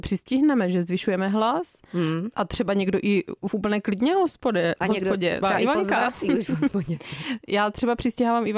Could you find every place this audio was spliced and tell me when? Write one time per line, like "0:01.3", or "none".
0:05.4